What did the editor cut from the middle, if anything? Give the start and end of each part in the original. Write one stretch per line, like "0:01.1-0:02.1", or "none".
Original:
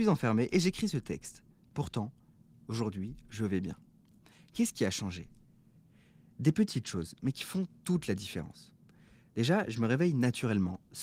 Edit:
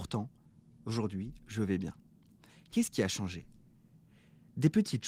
none

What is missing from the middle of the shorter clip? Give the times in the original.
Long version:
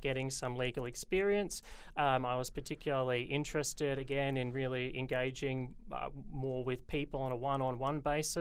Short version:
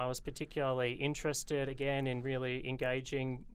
none

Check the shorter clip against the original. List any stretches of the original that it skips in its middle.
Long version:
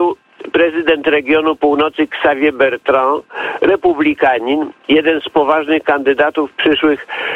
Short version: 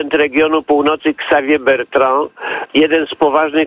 0:03.6-0:04.8

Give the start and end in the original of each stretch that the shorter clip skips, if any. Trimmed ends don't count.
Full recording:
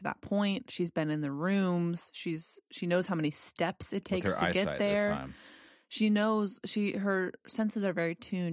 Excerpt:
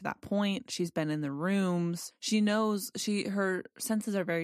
0:02.1-0:05.8

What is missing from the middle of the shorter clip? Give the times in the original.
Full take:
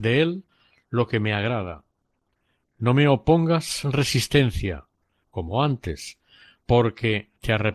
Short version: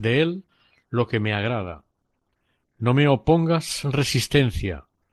none

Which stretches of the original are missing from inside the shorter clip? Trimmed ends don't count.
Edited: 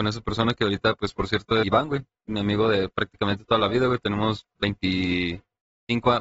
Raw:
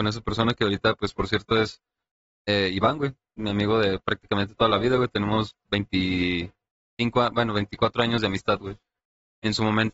0:01.6-0:02.7

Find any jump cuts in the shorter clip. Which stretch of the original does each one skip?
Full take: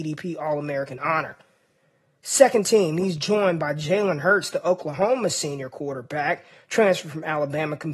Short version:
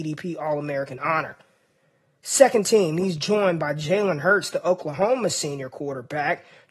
none

